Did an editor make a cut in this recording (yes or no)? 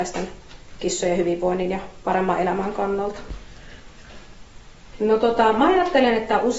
yes